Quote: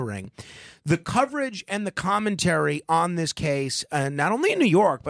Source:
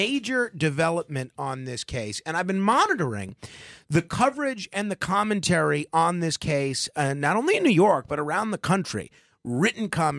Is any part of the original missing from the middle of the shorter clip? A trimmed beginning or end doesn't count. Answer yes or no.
no